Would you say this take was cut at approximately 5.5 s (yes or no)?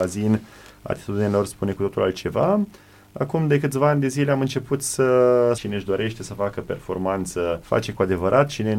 yes